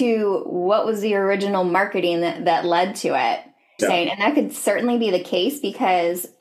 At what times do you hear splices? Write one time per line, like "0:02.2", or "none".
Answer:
0:03.8